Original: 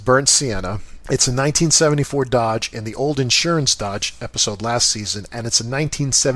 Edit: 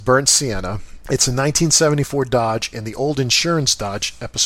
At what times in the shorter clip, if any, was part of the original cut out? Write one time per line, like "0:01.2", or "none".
none